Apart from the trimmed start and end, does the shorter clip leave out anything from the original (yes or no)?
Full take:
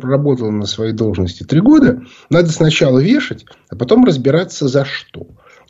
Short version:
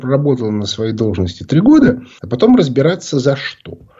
yes